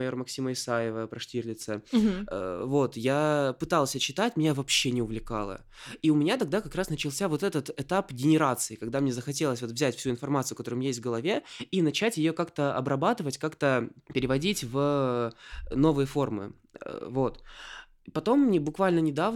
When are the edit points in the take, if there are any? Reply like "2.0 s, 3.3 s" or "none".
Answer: none